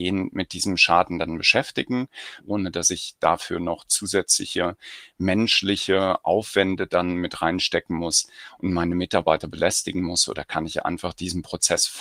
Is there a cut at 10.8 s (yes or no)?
no